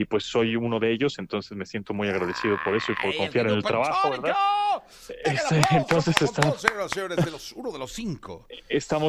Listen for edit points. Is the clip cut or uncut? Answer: uncut